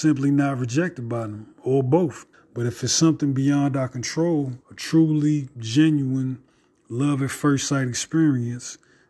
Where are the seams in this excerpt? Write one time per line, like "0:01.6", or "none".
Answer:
0:02.3
0:04.6